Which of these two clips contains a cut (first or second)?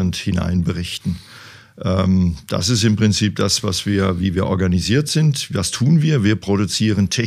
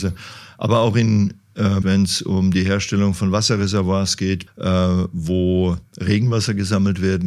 second